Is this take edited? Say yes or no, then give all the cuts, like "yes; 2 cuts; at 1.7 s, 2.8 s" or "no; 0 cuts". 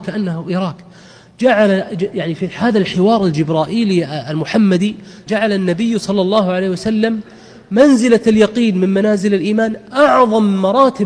yes; 1 cut; at 5.3 s